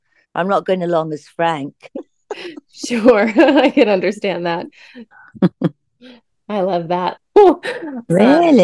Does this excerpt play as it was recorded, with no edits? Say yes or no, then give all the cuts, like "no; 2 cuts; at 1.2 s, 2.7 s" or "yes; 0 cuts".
no; 2 cuts; at 5.1 s, 7.2 s